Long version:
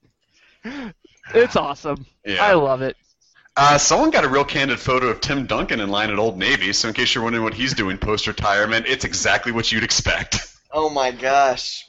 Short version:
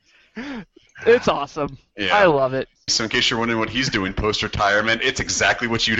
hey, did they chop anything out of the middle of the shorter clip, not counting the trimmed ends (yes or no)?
yes